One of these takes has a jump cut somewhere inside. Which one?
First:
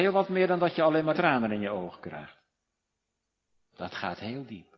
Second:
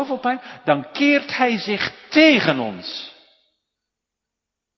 first; 1 cut; at 1.1 s

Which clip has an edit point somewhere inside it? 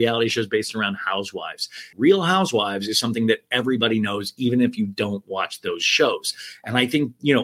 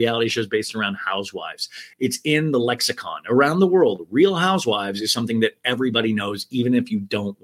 first; 1 cut; at 1.9 s

